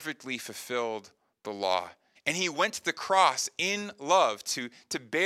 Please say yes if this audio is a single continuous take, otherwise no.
no